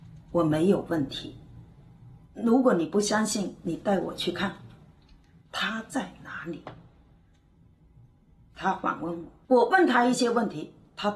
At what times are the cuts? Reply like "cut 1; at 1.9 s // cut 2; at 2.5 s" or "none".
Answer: cut 1; at 5.5 s // cut 2; at 9.4 s